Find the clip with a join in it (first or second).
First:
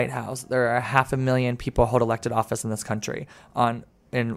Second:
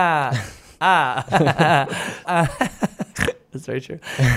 second